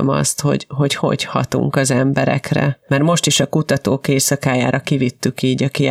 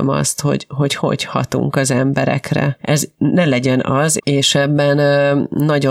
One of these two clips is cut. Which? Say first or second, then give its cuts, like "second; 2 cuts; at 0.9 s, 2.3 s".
second; 2 cuts; at 2.8 s, 4.2 s